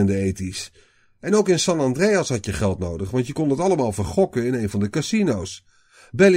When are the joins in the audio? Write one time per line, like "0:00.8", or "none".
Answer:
none